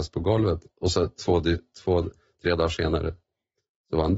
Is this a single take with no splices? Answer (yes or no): yes